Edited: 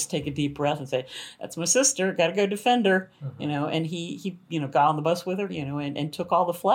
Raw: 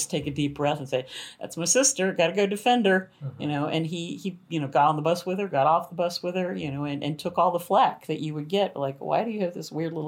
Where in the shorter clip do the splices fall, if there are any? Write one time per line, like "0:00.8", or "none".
0:05.5